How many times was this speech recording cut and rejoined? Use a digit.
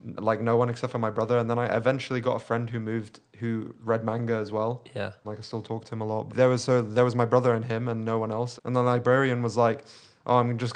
3